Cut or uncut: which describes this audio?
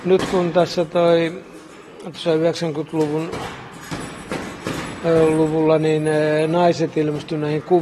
uncut